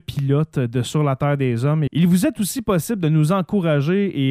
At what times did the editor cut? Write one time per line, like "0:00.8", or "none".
0:01.9